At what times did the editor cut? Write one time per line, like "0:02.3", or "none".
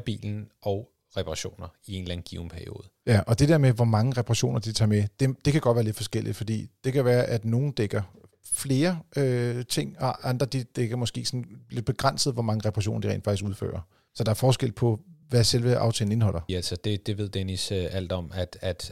0:15.2
0:16.5